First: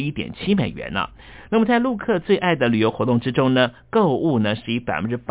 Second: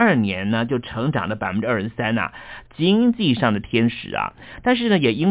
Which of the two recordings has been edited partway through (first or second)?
second